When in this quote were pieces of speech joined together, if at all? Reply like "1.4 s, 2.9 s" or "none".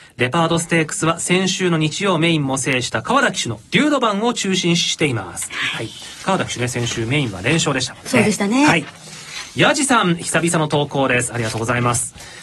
none